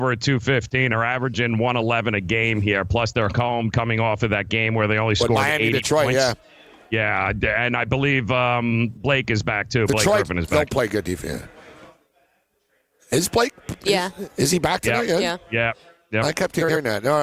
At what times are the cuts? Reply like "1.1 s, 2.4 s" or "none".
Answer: none